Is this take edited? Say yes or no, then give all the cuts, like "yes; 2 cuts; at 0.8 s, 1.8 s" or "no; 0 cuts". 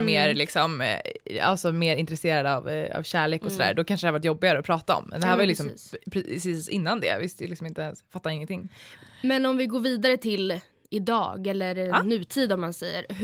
no; 0 cuts